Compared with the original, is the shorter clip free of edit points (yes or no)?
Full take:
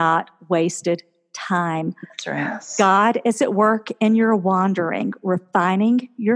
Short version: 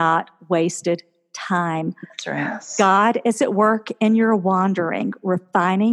yes